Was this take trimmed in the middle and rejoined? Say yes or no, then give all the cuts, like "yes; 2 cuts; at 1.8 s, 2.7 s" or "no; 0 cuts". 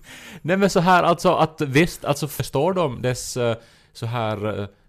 no; 0 cuts